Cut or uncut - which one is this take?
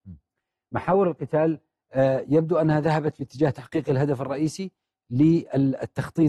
uncut